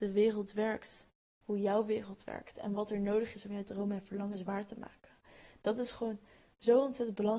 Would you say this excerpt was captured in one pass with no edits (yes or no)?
yes